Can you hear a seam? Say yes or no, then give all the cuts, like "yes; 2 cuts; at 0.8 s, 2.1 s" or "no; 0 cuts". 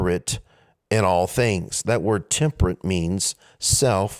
no; 0 cuts